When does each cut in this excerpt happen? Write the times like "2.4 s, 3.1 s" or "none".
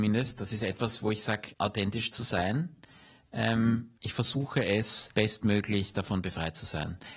1.5 s, 4.0 s, 5.1 s